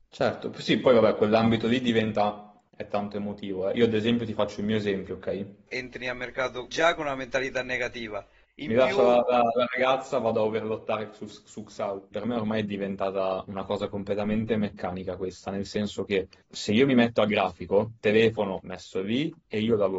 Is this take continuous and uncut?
yes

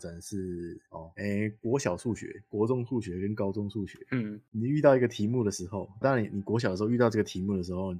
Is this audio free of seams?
no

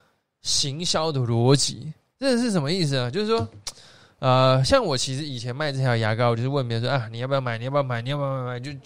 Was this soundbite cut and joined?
no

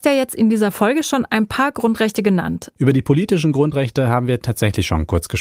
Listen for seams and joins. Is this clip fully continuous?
no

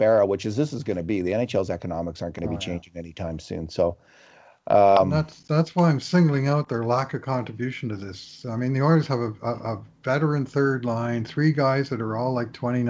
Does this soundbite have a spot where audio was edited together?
no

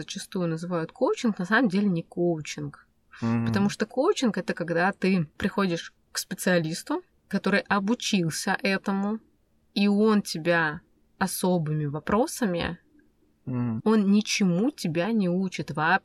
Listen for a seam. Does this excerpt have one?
yes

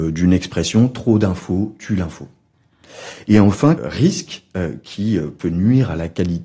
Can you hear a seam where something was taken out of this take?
yes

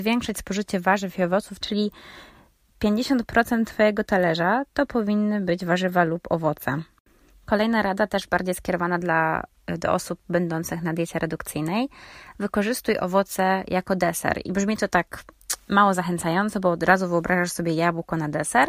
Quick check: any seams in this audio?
yes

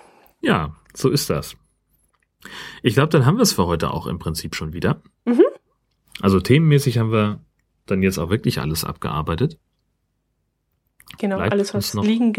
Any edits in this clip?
no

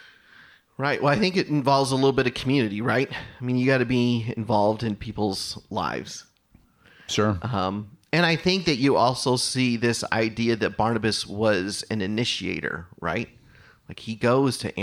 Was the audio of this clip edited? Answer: no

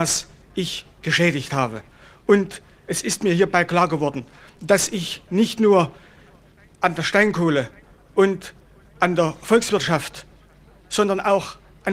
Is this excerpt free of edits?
yes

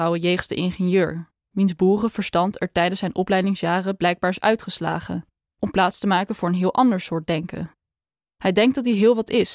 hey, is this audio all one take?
yes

